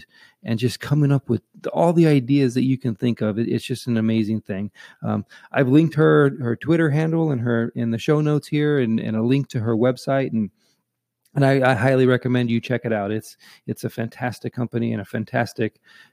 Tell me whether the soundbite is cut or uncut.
uncut